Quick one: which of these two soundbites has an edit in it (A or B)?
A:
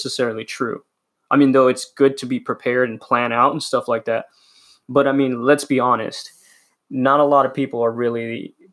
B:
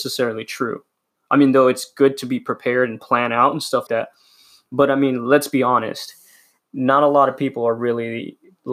B